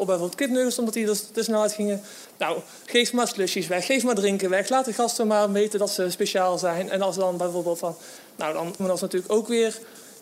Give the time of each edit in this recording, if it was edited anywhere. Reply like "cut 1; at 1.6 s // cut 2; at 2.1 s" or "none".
cut 1; at 8.8 s